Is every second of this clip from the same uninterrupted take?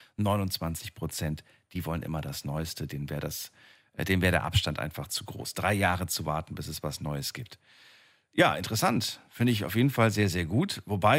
yes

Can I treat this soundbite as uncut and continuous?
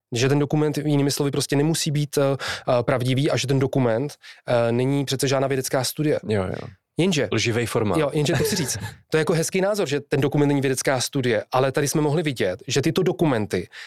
yes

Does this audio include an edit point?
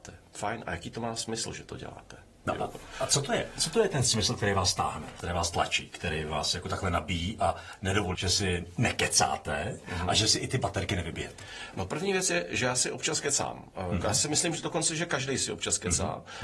yes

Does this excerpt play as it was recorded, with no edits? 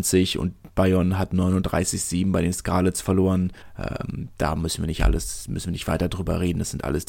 yes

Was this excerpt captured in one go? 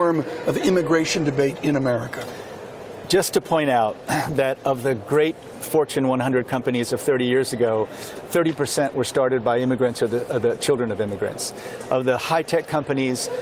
yes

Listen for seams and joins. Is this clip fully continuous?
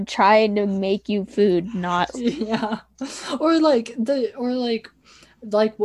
no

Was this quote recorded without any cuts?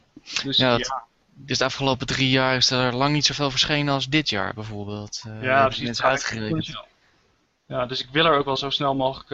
yes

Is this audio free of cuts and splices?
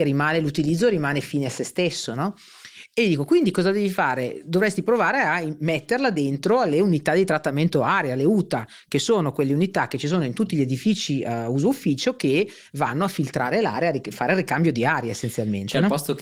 yes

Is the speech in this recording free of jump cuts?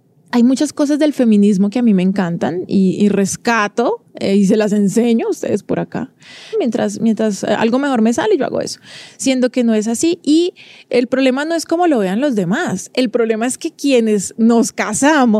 no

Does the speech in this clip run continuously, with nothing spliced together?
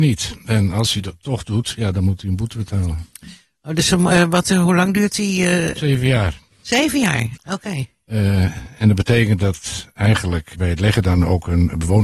no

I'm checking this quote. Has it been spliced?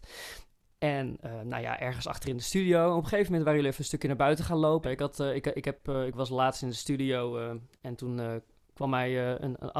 yes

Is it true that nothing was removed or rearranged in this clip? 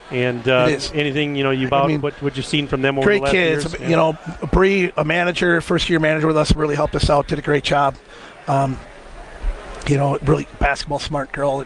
no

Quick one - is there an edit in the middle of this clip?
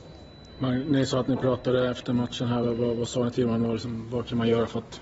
no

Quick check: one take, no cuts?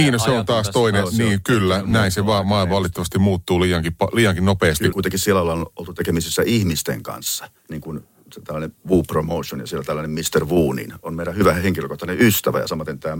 no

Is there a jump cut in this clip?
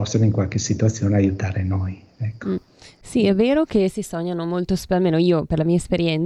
no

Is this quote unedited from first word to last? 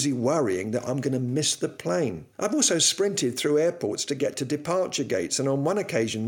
no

